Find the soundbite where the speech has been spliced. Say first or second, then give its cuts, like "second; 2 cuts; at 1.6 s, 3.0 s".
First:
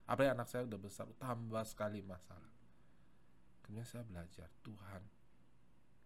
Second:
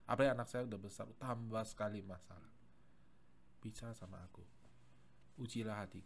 second; 1 cut; at 3.6 s